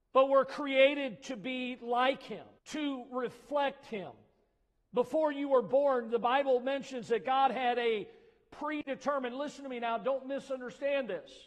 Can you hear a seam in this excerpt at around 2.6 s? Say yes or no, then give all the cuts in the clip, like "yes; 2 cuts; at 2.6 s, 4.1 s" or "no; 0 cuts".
yes; 1 cut; at 2.6 s